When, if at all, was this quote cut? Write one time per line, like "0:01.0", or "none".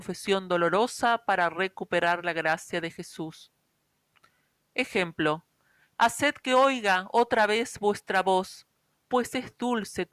0:05.9